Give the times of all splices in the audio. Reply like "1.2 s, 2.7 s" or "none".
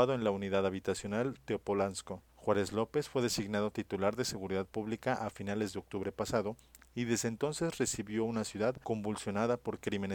2.3 s